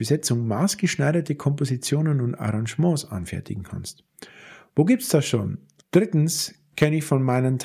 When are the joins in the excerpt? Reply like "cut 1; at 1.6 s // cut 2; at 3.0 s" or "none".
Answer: cut 1; at 5.8 s